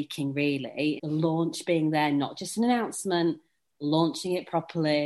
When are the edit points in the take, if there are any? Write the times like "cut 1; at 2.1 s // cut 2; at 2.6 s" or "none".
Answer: cut 1; at 1.0 s